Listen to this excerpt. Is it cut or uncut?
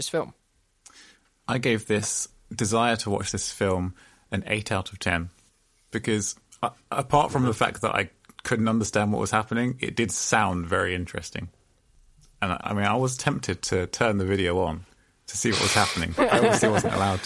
cut